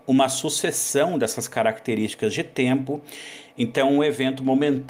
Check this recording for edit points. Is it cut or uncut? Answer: uncut